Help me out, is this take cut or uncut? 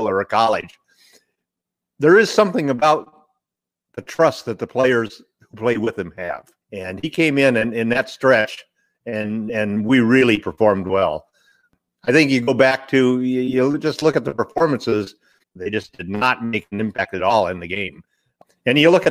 cut